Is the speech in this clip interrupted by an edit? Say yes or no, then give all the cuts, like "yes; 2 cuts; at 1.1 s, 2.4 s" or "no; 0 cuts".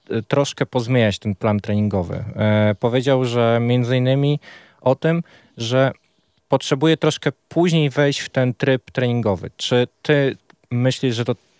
no; 0 cuts